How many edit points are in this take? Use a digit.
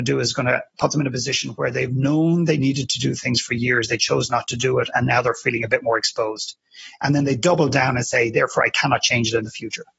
0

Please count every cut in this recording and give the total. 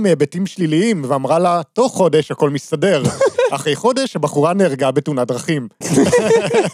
1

